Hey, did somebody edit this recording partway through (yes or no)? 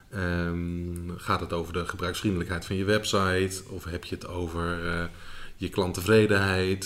no